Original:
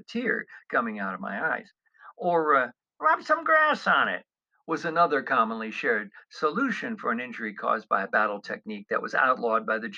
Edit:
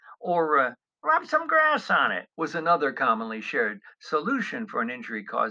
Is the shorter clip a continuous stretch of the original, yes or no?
no